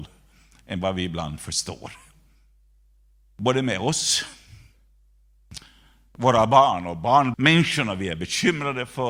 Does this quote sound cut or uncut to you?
cut